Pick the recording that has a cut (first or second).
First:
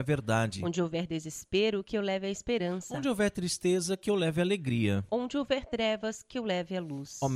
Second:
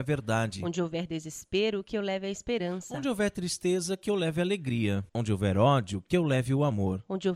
second